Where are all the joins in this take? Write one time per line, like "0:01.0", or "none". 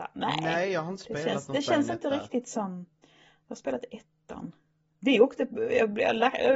0:04.9